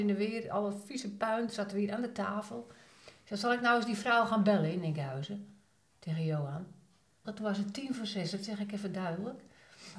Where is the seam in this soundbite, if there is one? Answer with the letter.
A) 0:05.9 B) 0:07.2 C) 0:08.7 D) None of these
B